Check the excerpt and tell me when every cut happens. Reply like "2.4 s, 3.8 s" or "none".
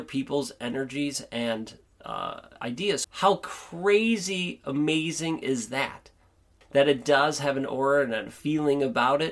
3.0 s, 6.6 s